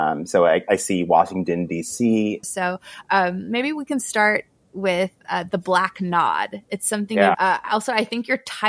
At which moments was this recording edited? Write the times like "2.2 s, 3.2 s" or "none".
2.4 s, 7.3 s